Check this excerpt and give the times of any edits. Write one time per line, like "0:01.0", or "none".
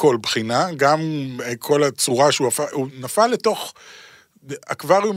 none